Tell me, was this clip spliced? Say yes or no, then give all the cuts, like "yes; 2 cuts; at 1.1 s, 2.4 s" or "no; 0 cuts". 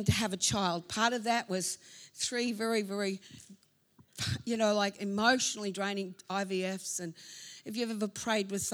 no; 0 cuts